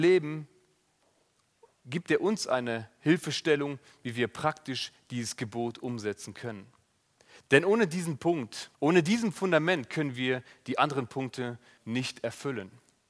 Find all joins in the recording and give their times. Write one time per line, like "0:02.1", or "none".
0:07.4
0:08.7
0:11.8